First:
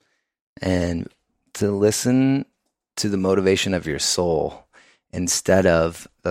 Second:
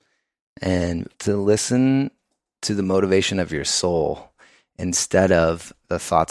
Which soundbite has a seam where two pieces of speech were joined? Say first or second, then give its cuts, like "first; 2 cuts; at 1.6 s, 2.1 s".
second; 1 cut; at 1.1 s